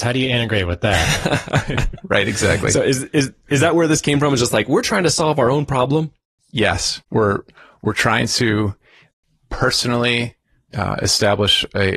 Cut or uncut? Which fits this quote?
uncut